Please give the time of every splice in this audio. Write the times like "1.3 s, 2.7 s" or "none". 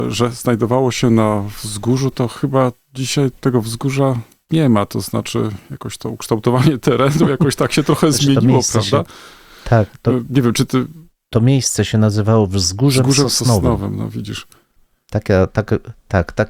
none